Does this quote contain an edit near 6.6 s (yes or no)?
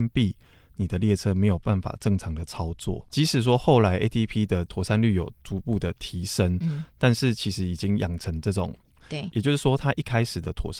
no